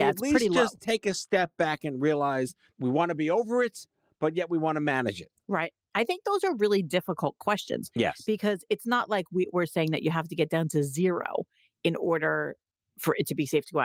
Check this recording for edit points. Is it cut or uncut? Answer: uncut